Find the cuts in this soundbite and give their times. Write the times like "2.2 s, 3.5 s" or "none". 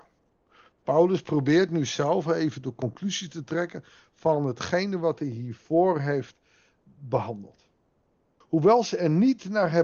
8.4 s